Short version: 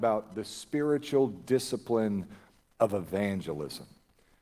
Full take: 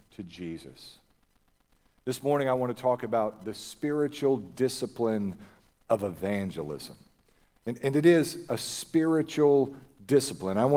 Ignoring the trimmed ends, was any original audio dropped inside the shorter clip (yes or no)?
no